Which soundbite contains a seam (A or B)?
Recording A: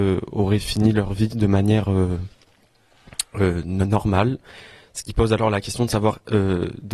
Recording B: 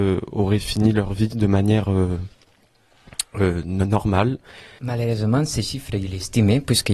B